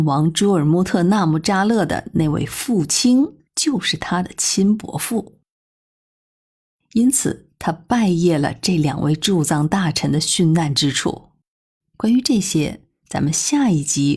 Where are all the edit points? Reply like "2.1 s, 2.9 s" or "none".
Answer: 3.5 s, 11.8 s